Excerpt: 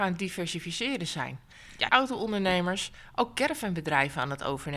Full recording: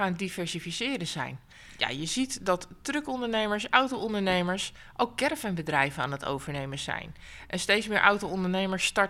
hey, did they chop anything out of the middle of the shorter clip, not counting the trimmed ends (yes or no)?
yes